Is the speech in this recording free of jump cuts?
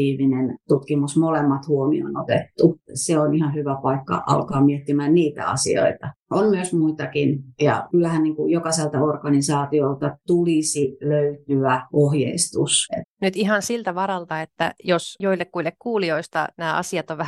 no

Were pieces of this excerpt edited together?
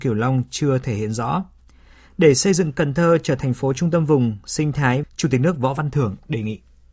yes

